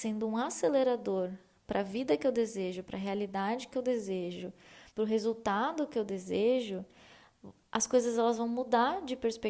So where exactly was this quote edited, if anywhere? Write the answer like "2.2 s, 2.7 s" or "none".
4.9 s